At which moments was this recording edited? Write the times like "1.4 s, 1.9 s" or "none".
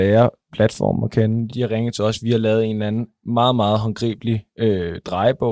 1.5 s